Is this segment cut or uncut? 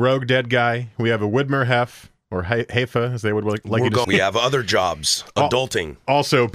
cut